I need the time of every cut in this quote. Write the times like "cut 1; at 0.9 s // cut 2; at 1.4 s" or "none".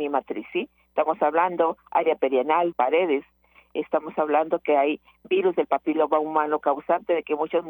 cut 1; at 2.7 s